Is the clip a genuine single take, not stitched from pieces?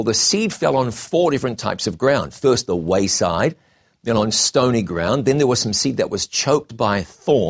yes; 0 cuts

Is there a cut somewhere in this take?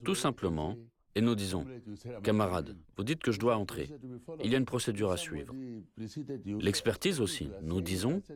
yes; 1 cut; at 6.6 s

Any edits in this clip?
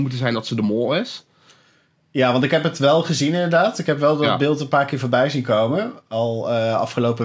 no; 0 cuts

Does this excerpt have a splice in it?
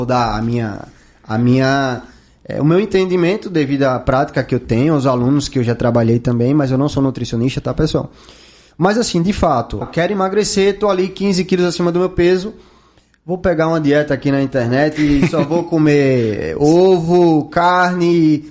yes; 1 cut; at 9.8 s

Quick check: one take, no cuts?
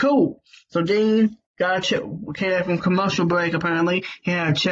no; 1 cut; at 1.5 s

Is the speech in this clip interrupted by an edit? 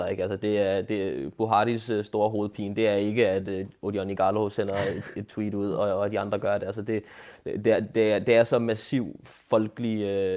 no; 0 cuts

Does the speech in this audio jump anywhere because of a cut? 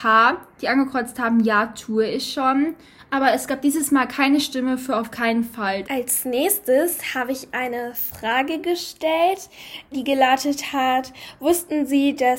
yes; 3 cuts; at 3.0 s, 5.8 s, 9.9 s

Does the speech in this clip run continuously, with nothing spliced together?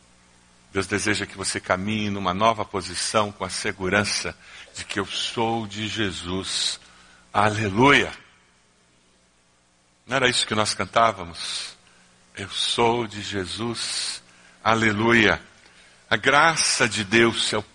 yes; 0 cuts

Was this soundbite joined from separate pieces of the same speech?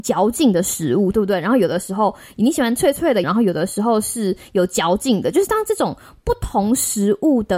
yes; 2 cuts; at 1.1 s, 3.2 s

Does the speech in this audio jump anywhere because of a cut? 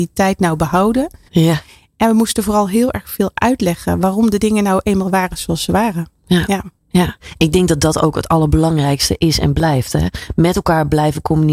yes; 1 cut; at 1.3 s

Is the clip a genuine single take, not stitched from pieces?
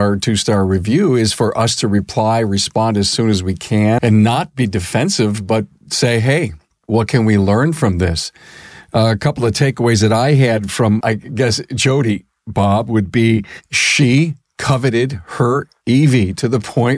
no; 2 cuts; at 4.0 s, 11.0 s

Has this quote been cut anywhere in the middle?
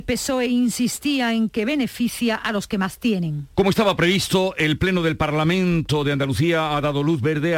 yes; 1 cut; at 3.5 s

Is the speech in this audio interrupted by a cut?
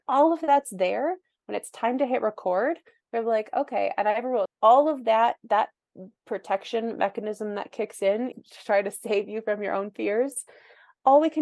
yes; 2 cuts; at 4.5 s, 8.3 s

